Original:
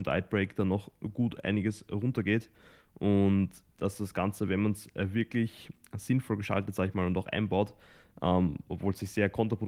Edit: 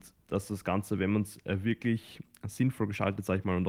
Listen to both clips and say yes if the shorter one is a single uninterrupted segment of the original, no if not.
yes